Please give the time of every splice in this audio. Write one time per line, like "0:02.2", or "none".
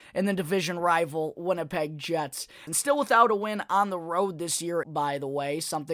0:02.7
0:04.8